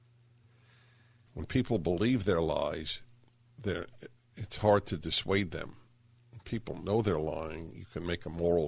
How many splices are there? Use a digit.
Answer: 1